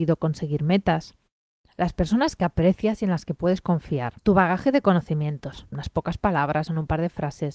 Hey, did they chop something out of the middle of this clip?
yes; 2 cuts; at 4.2 s, 5.7 s

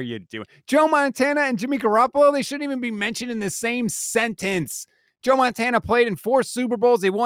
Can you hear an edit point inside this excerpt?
no; 0 cuts

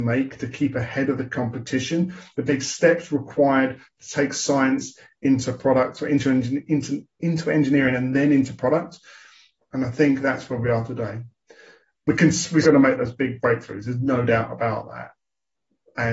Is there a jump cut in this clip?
yes; 2 cuts; at 9.6 s, 12.6 s

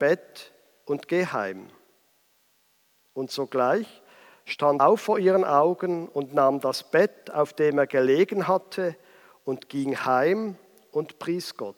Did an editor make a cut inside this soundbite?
yes; 1 cut; at 4.8 s

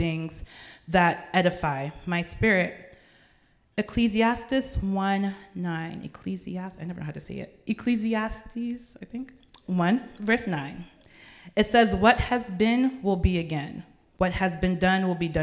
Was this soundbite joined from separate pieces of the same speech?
no; 0 cuts

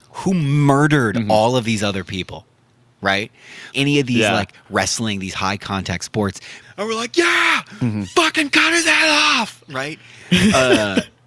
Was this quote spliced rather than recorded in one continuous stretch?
yes; 2 cuts; at 3.7 s, 6.6 s

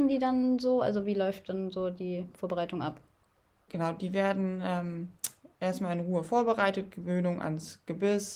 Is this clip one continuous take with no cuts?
yes; 0 cuts

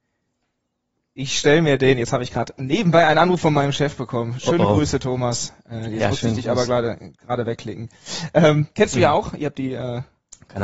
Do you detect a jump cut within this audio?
no; 0 cuts

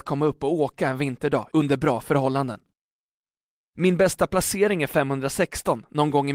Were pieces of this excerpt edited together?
no; 0 cuts

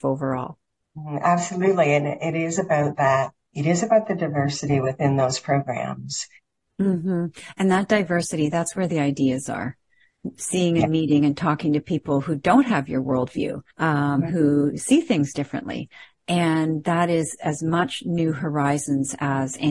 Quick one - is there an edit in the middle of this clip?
yes; 1 cut; at 13.7 s

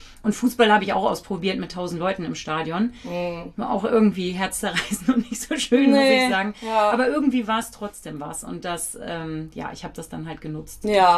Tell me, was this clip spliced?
no; 0 cuts

